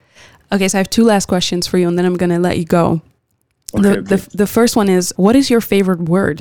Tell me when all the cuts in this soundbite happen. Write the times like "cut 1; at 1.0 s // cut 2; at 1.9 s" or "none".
cut 1; at 5.1 s